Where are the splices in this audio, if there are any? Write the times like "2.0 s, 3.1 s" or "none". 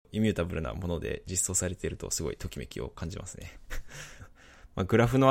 4.2 s